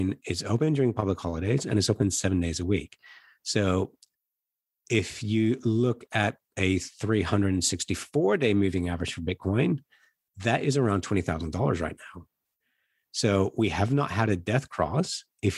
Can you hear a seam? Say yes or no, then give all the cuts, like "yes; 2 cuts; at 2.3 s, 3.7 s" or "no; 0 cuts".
no; 0 cuts